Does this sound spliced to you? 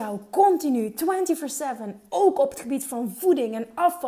no; 0 cuts

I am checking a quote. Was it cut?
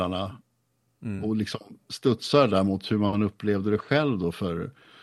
no; 0 cuts

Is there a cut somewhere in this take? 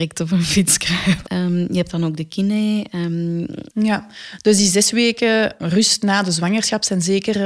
yes; 2 cuts; at 1.2 s, 3.7 s

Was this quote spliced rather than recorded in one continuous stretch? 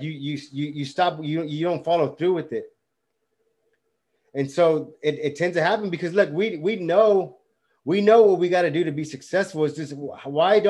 no; 0 cuts

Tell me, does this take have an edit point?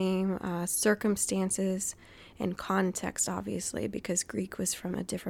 no; 0 cuts

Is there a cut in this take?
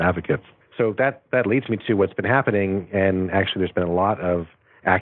no; 0 cuts

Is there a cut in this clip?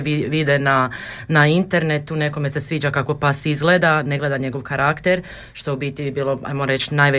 no; 0 cuts

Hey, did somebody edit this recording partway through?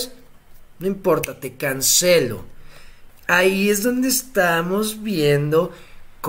yes; 1 cut; at 3.1 s

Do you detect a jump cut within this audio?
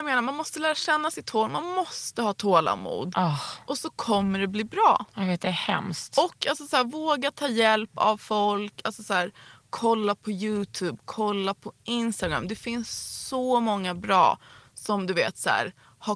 no; 0 cuts

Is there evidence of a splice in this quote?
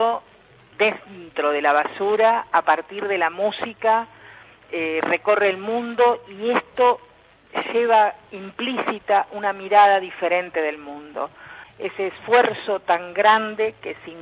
no; 0 cuts

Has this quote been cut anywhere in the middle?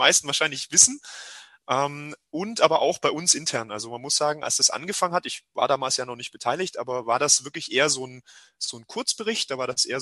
no; 0 cuts

